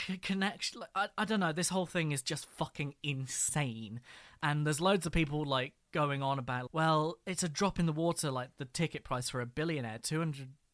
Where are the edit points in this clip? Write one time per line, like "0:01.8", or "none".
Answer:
0:06.7